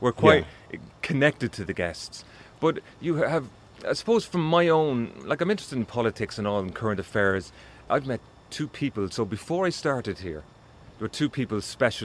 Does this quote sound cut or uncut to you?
cut